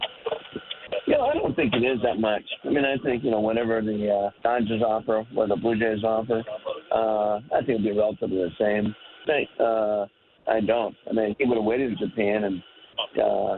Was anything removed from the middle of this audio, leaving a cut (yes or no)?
yes